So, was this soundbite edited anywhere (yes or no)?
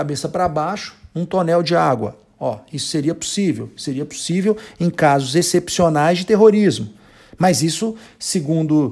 no